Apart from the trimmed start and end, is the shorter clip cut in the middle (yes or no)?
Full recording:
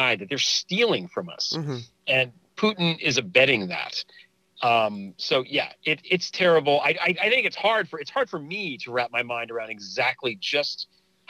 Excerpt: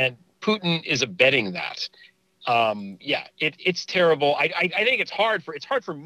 yes